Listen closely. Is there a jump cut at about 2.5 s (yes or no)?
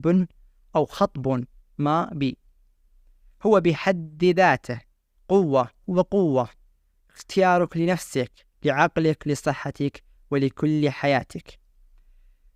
no